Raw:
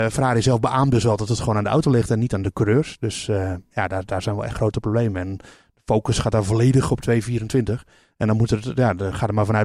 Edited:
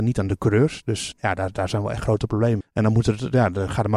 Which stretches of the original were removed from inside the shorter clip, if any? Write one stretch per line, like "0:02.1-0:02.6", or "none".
0:03.3-0:03.7
0:05.1-0:08.0